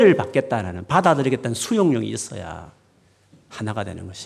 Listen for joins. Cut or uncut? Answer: uncut